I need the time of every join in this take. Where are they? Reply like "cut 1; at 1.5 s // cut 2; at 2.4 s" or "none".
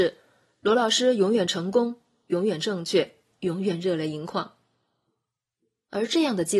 cut 1; at 3.3 s